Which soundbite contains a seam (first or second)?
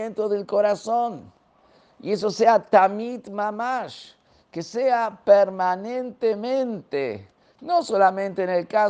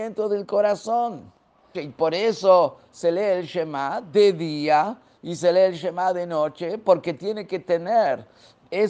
second